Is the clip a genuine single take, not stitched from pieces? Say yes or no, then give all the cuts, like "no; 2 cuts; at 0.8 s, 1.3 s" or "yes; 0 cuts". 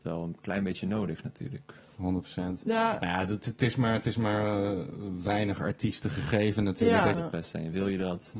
no; 1 cut; at 7.1 s